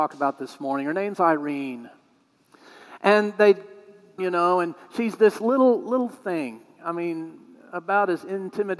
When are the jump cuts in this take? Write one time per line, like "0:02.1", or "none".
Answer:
0:04.2